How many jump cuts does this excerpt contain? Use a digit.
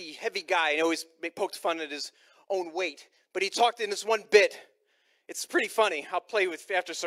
0